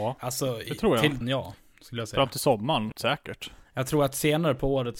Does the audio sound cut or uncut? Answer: cut